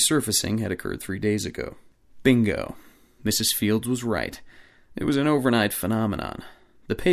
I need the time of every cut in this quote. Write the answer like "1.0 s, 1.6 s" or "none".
none